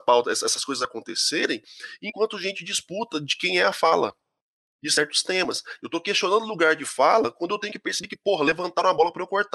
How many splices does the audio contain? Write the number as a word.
one